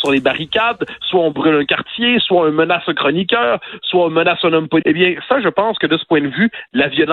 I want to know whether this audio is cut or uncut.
cut